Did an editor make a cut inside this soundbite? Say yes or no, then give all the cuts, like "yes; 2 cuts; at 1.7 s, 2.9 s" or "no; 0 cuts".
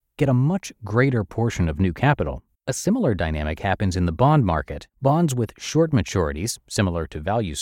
yes; 2 cuts; at 2.5 s, 4.9 s